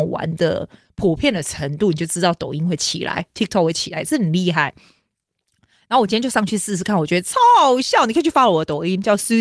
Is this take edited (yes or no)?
no